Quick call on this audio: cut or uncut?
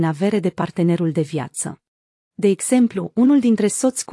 cut